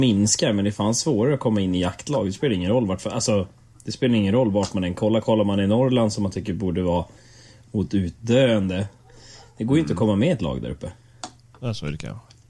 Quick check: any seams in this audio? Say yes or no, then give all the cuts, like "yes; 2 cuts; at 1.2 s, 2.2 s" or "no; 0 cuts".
no; 0 cuts